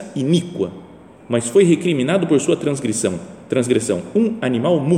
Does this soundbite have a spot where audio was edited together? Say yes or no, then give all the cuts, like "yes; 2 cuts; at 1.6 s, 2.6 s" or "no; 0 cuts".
no; 0 cuts